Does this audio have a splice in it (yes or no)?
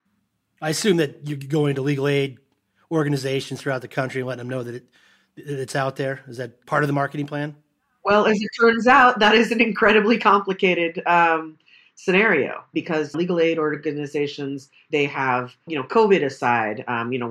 yes